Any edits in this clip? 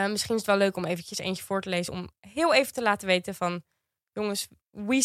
no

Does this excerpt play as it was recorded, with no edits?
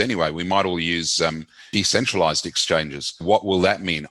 no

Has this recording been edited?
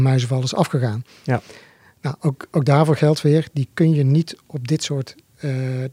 no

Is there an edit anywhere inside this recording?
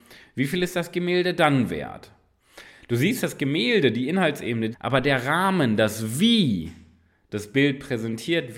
yes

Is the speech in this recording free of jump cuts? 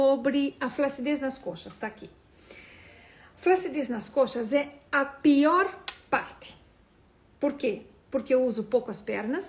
yes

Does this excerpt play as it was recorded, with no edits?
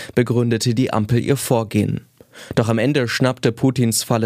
yes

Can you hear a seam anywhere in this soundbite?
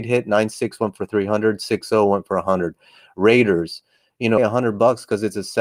yes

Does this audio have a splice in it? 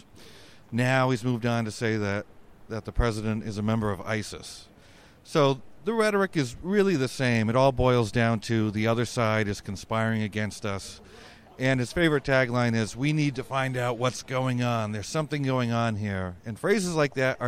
no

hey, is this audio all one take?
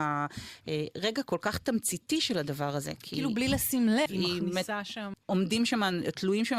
no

